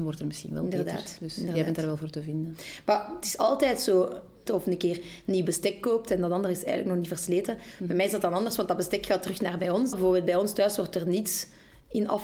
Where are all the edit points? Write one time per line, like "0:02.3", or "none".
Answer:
0:04.5
0:09.9

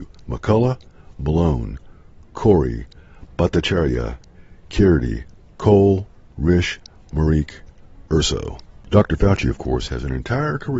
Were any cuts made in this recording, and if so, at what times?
none

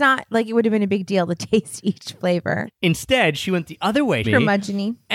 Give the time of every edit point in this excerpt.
0:02.7
0:04.2

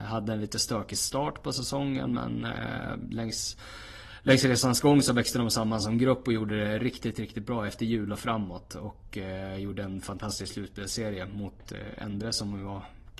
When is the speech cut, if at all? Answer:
none

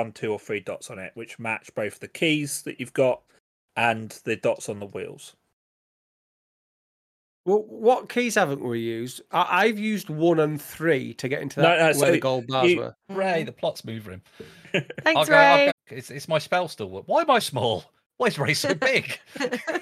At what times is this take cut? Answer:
0:13.1
0:15.7
0:17.4

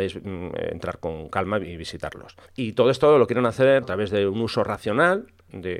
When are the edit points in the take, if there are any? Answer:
0:02.5
0:03.8

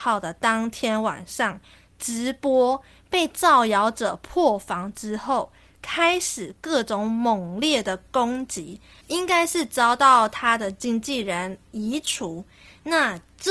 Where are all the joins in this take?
0:09.0

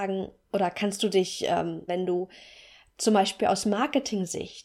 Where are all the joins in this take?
0:01.9

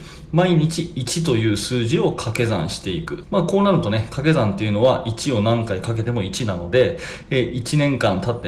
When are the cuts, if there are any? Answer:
0:03.2

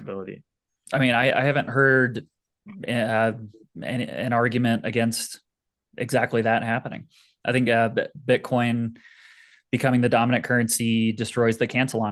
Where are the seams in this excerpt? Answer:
none

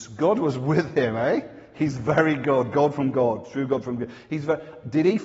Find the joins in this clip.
none

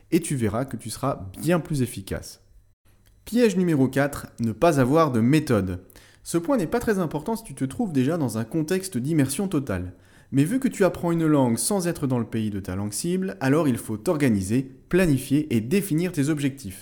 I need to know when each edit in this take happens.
none

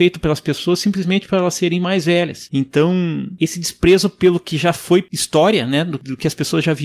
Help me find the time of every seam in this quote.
0:02.5

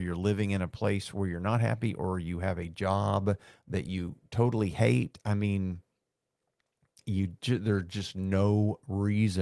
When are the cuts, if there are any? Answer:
none

